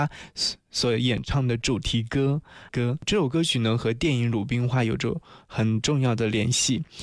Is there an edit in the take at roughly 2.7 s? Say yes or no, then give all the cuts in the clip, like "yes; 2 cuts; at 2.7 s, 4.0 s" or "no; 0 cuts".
yes; 1 cut; at 2.7 s